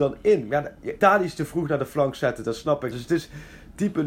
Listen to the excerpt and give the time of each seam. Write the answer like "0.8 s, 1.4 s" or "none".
1.0 s, 2.9 s